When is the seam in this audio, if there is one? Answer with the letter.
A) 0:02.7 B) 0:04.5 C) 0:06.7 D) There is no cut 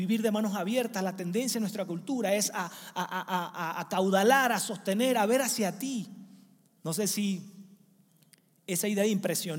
C